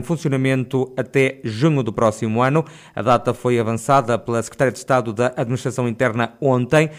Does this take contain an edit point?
no; 0 cuts

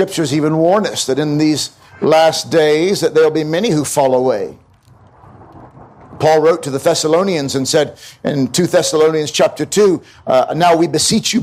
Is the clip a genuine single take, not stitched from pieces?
yes; 0 cuts

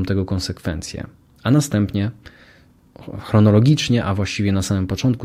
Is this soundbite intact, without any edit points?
yes; 0 cuts

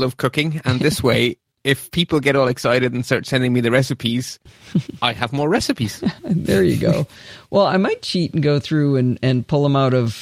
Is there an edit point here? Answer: no; 0 cuts

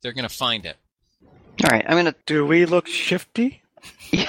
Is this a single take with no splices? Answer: yes; 0 cuts

